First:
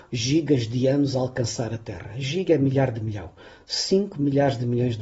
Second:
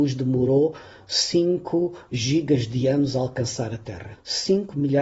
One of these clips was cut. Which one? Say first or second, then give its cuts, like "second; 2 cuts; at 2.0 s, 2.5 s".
second; 1 cut; at 4.1 s